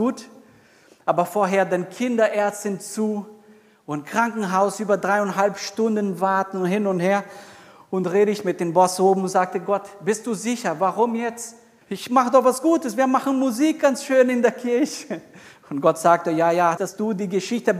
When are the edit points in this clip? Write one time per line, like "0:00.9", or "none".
0:11.8
0:16.8